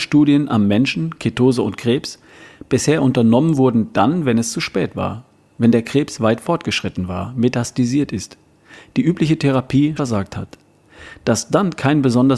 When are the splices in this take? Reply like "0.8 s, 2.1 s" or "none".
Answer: 10.0 s